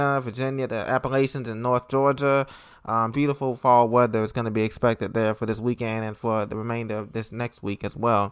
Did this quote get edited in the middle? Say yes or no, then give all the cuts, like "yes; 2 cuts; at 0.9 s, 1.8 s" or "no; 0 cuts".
yes; 1 cut; at 3.1 s